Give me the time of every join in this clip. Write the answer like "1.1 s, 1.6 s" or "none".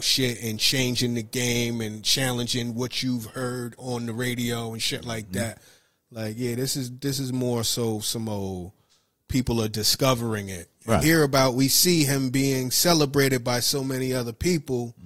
11.0 s